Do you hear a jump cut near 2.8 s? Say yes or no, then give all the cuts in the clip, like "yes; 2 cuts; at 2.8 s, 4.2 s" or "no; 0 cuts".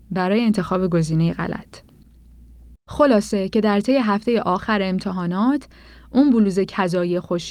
yes; 1 cut; at 2.8 s